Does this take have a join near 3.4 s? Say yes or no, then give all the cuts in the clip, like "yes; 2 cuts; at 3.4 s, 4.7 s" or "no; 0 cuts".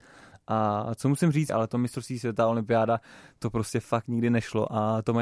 no; 1 cut; at 1.5 s